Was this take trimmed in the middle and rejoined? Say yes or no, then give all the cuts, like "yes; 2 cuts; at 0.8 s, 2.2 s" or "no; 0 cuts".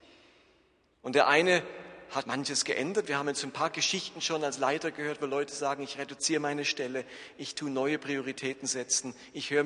yes; 1 cut; at 2.2 s